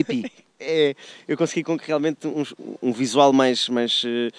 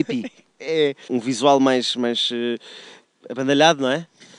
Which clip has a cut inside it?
second; 1 cut; at 1.1 s

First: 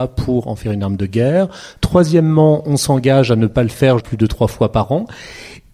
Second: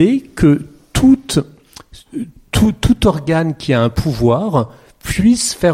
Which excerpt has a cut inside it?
first; 2 cuts; at 1.8 s, 4.0 s

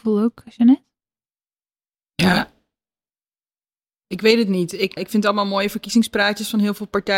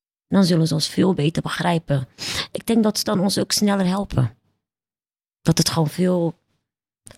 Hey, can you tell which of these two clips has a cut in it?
first; 1 cut; at 5.0 s

